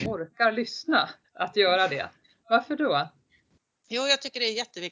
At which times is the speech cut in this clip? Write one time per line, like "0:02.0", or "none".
0:01.2